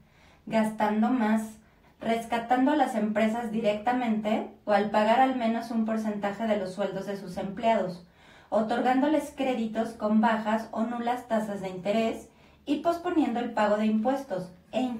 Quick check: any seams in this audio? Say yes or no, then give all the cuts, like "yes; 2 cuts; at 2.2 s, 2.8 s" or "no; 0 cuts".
yes; 1 cut; at 1.8 s